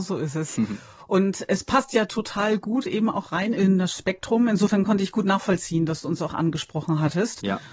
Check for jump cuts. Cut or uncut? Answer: uncut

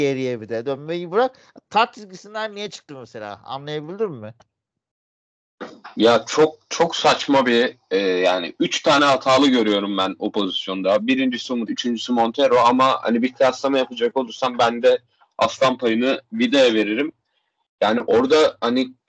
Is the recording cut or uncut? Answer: cut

